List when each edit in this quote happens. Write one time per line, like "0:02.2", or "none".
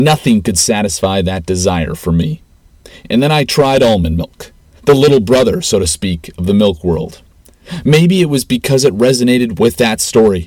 none